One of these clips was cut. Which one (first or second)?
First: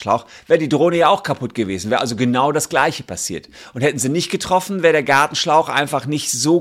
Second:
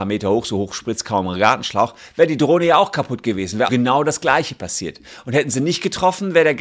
second